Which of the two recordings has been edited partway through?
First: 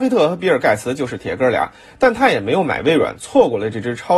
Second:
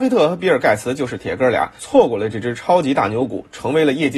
second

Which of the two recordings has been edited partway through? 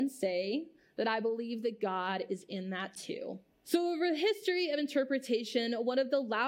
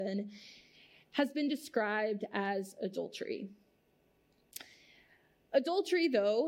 first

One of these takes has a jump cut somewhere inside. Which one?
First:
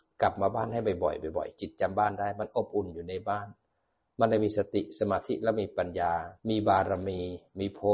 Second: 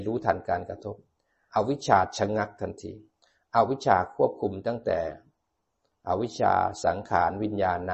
first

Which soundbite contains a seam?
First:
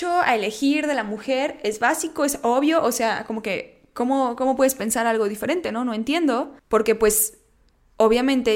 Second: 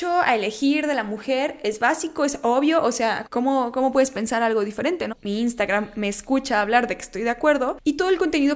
second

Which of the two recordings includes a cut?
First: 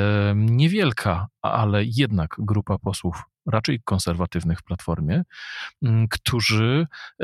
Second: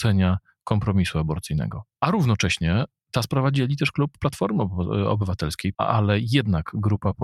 second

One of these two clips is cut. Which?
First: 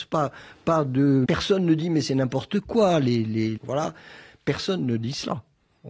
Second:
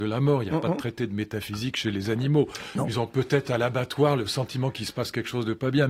first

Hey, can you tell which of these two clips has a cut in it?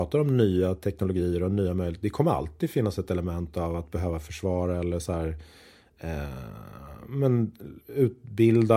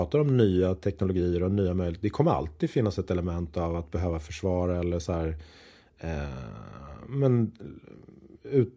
first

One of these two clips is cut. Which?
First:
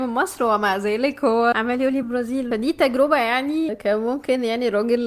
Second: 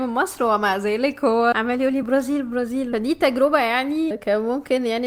first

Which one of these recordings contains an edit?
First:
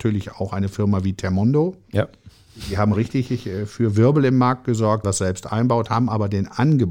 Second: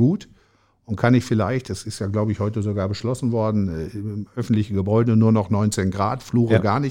first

